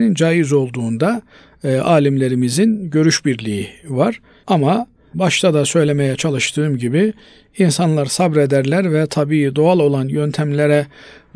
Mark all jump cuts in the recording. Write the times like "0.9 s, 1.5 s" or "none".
4.4 s